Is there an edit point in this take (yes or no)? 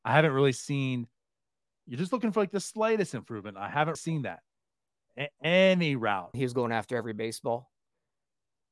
yes